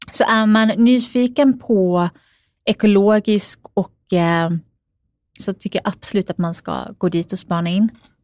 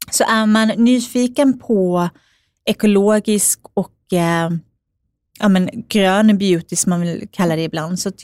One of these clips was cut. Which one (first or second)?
first